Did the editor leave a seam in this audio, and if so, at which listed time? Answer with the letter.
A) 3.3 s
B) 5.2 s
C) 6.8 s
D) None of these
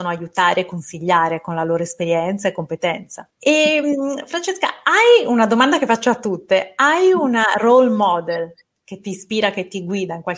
A